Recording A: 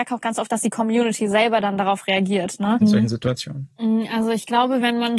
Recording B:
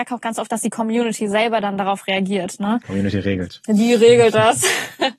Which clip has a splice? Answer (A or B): A